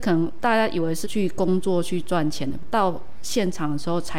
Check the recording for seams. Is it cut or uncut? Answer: cut